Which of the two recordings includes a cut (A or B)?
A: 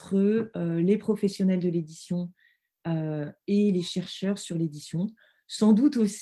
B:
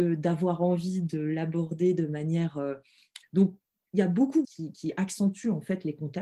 B